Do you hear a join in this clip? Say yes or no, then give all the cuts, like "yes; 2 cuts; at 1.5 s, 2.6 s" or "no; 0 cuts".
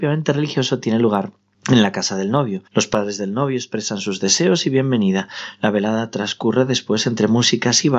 yes; 1 cut; at 2.7 s